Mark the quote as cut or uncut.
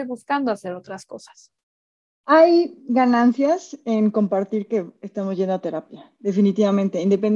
uncut